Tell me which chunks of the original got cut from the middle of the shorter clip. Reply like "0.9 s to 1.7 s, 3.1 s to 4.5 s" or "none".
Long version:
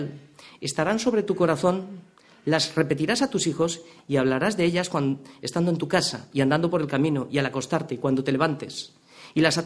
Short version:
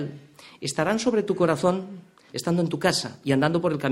2.3 s to 5.4 s